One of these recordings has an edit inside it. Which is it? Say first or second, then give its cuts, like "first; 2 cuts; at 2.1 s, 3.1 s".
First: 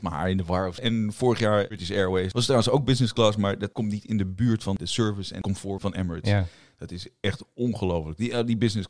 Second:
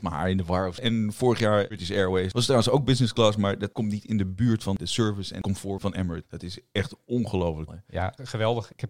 second; 2 cuts; at 6.2 s, 7.7 s